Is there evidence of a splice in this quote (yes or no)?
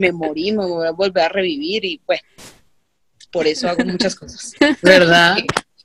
yes